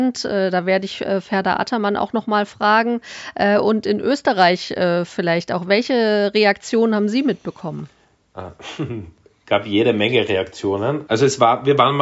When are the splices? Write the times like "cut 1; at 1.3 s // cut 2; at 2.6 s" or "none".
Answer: none